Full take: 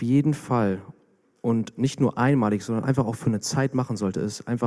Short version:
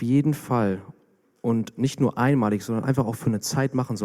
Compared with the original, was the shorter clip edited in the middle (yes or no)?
no